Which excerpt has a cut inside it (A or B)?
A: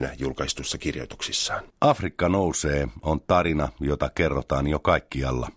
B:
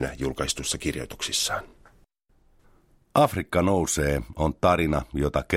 A